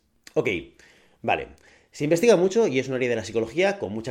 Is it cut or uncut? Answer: uncut